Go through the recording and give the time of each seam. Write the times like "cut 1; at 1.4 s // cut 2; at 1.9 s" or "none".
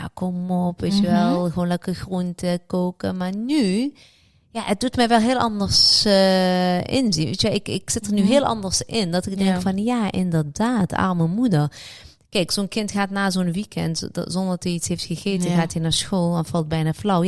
none